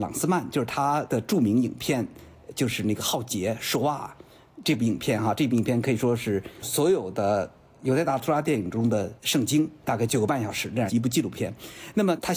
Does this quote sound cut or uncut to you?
uncut